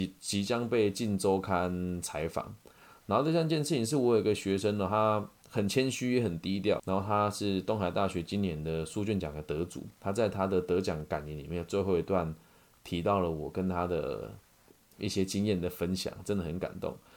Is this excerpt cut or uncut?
cut